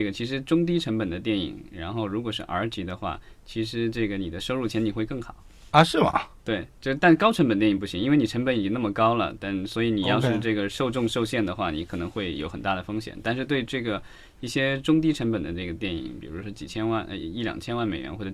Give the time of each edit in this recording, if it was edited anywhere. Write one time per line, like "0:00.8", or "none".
none